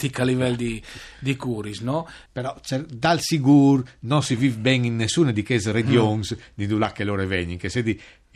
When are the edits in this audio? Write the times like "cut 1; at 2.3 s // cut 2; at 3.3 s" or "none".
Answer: cut 1; at 2.3 s